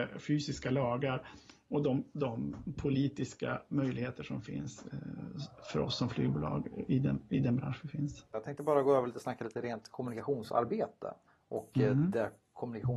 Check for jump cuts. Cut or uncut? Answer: cut